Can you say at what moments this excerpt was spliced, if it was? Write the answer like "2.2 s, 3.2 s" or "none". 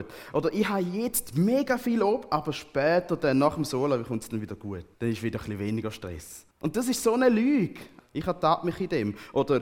4.9 s, 6.5 s, 8.0 s